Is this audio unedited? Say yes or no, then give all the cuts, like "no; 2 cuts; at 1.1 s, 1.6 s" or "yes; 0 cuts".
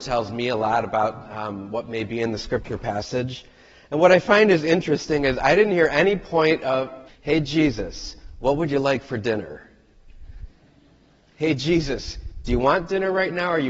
no; 1 cut; at 7.1 s